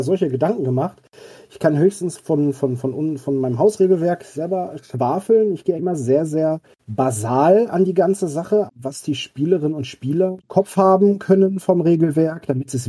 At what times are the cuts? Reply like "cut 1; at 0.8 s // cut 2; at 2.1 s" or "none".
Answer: cut 1; at 5.8 s // cut 2; at 8.7 s // cut 3; at 10.4 s